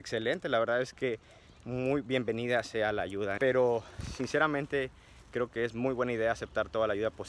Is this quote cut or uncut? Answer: cut